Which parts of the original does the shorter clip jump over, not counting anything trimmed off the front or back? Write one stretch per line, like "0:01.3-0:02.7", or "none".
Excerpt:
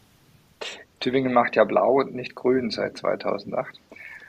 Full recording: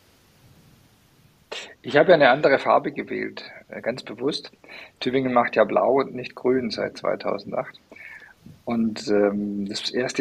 0:01.8-0:04.9